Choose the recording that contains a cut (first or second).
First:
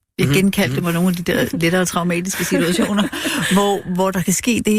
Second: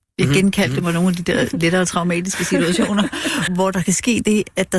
second